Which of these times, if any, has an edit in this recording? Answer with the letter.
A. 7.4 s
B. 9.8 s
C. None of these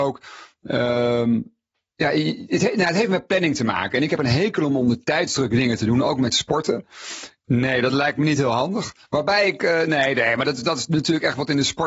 A